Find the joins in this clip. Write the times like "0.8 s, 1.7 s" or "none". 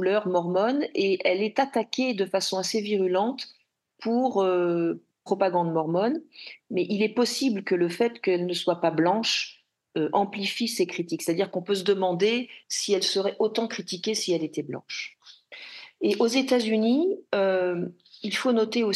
none